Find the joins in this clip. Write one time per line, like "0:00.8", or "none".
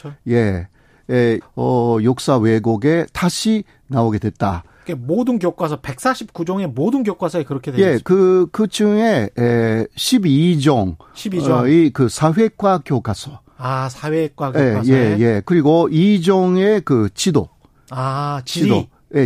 0:01.4